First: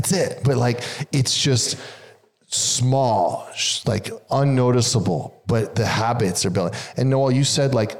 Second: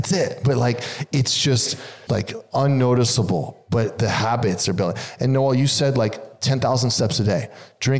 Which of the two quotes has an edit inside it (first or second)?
second